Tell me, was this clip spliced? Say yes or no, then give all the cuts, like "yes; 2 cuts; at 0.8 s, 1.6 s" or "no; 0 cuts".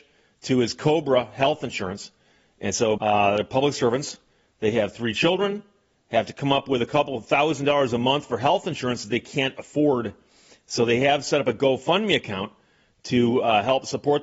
yes; 1 cut; at 3.0 s